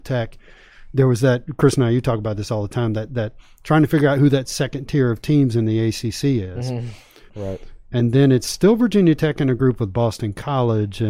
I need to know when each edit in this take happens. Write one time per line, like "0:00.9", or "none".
0:07.3